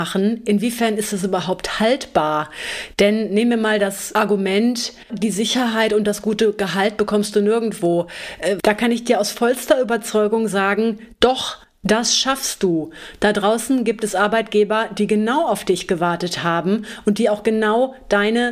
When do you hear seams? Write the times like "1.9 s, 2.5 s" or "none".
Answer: 5.1 s, 8.6 s